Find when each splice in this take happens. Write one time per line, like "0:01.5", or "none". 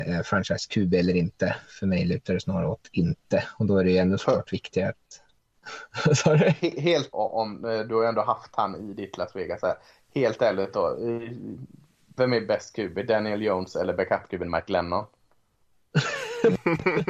0:07.1

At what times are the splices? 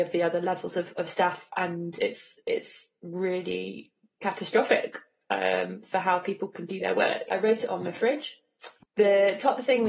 0:07.3
0:08.8

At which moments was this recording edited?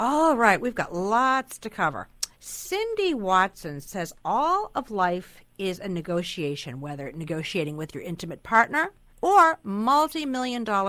0:02.3
0:09.1

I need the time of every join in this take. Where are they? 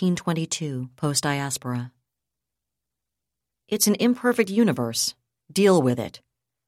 none

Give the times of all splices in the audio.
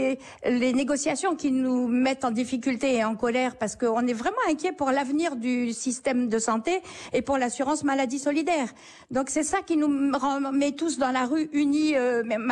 none

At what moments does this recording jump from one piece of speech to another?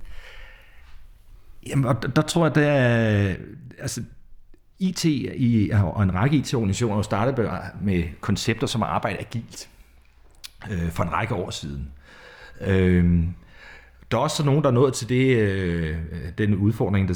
none

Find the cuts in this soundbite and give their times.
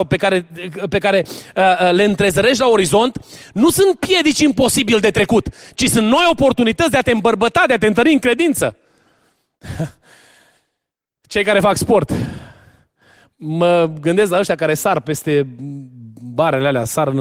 none

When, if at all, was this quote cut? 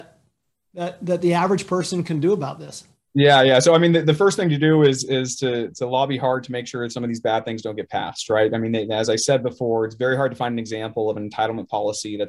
none

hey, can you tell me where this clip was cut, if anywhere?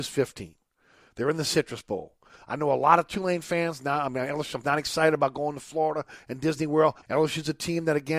0:04.6
0:07.0

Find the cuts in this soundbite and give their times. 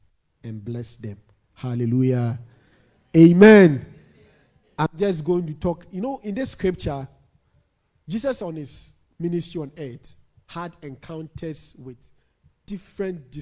none

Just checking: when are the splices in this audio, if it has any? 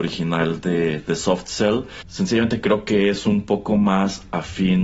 0:02.0

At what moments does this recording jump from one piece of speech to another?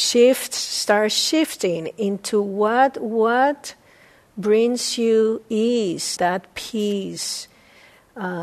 0:06.2

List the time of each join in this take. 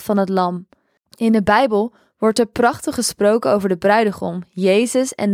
0:01.0

